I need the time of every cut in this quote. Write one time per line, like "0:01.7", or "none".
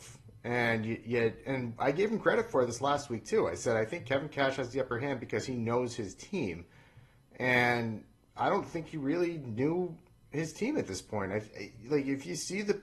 none